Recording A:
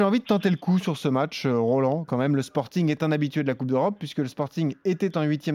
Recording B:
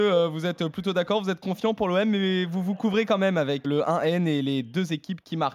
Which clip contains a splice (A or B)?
B